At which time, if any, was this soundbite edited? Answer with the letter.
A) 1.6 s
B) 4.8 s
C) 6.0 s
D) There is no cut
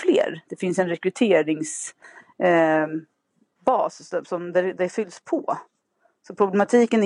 B